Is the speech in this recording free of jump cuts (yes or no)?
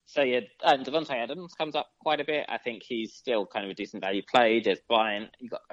yes